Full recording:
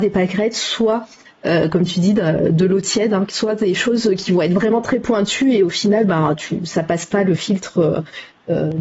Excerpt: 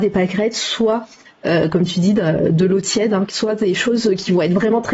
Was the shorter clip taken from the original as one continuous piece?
yes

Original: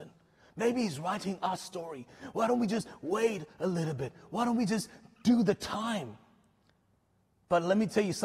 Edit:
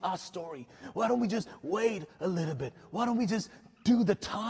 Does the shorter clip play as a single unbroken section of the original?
yes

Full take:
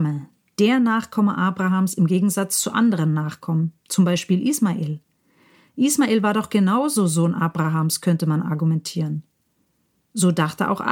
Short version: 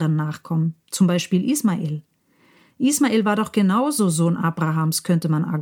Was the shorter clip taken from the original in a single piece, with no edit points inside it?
yes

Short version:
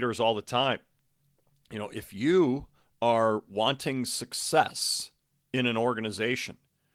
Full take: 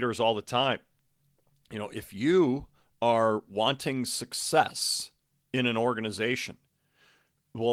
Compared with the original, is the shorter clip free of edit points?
yes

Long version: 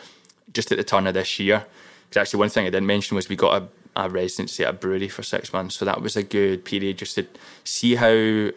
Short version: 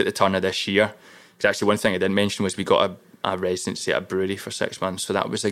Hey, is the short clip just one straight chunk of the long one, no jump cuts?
yes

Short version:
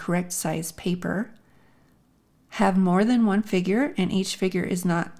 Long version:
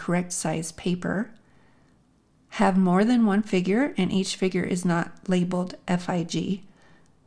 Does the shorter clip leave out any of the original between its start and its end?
no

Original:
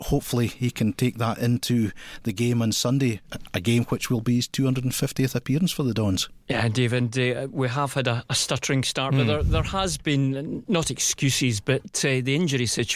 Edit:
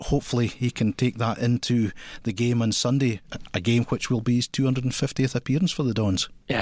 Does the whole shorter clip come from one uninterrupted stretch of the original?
yes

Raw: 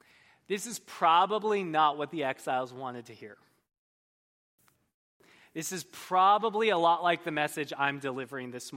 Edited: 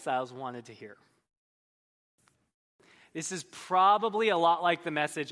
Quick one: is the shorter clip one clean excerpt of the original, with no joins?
yes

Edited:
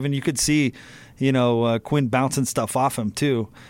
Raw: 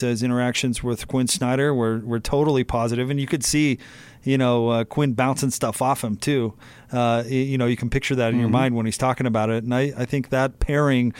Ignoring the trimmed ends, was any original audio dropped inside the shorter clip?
no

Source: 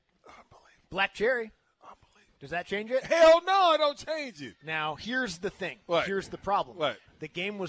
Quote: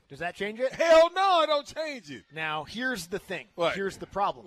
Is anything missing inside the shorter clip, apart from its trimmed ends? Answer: no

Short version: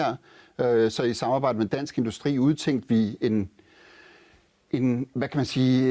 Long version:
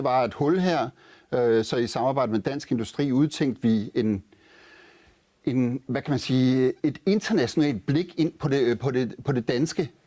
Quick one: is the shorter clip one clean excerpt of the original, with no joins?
yes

